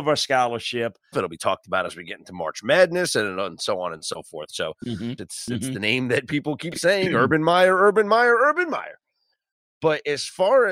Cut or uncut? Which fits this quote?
cut